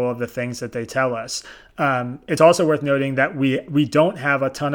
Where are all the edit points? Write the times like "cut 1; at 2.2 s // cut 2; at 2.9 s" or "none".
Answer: none